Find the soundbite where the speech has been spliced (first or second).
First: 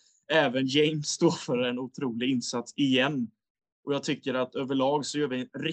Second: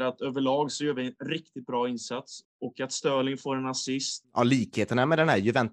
second